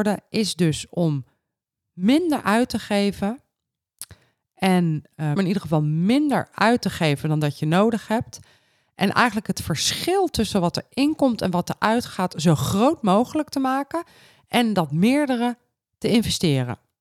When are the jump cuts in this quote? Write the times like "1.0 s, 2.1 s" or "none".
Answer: 5.3 s